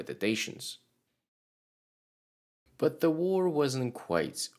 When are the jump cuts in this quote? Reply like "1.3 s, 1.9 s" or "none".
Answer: none